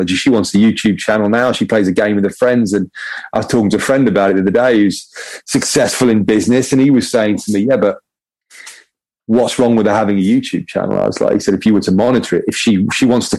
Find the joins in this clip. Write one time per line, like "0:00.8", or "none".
none